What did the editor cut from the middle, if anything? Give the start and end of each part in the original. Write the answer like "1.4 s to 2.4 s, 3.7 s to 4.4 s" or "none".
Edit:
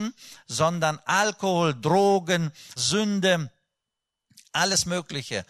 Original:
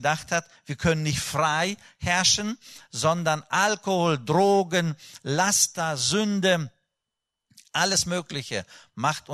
5.2 s to 6.0 s